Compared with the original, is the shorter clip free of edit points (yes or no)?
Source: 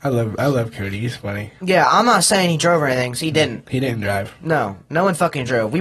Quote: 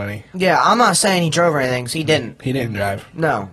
yes